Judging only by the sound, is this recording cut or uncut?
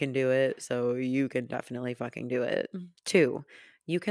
cut